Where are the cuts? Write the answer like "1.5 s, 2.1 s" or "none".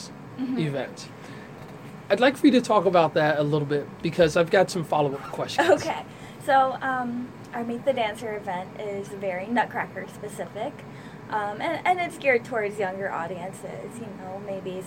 none